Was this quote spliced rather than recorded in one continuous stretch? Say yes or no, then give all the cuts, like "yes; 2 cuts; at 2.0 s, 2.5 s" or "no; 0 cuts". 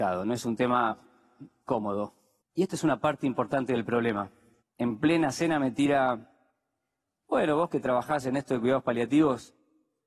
yes; 1 cut; at 4.6 s